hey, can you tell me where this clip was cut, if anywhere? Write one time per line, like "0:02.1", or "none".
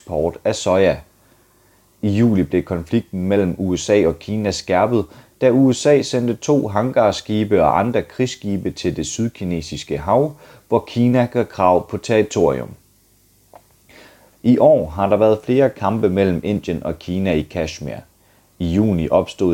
0:14.3

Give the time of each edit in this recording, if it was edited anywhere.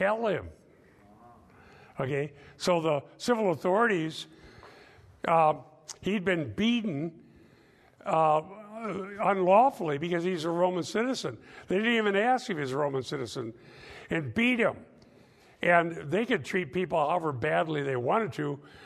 none

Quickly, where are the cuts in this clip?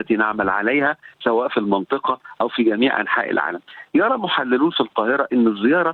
none

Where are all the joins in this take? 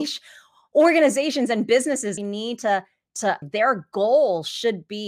0:02.2
0:03.4

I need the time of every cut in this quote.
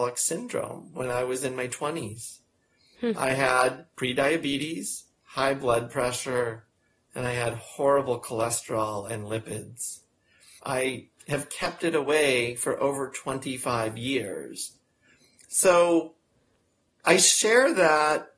0:10.6

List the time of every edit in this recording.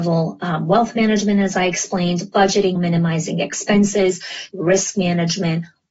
0:02.8
0:04.5

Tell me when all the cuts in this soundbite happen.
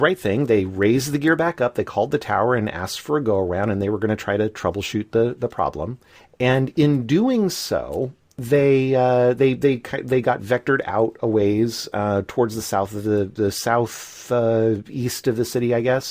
none

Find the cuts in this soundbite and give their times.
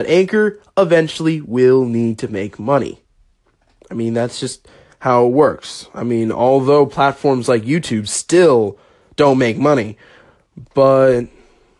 none

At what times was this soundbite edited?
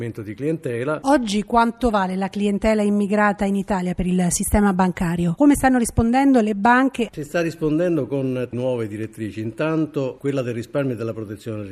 0:05.4

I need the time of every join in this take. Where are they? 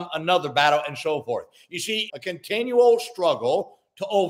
0:02.1

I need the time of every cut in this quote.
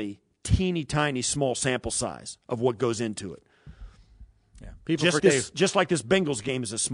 0:05.2

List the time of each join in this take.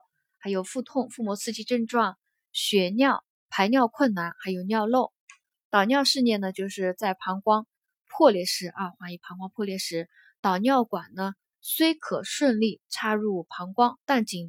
0:05.5

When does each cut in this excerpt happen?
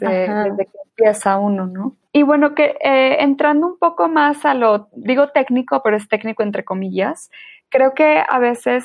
0:02.1

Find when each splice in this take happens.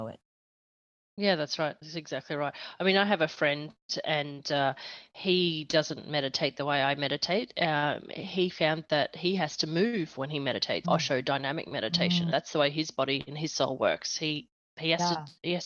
0:10.8
0:12.3

